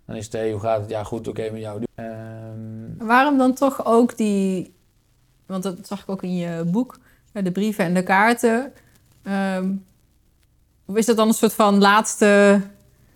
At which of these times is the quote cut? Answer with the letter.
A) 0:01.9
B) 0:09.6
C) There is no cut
A